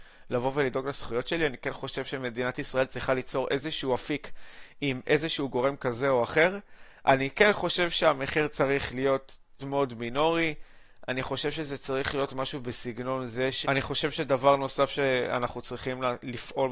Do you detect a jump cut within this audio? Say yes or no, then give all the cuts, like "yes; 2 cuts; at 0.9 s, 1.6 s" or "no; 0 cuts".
yes; 2 cuts; at 9.6 s, 13.6 s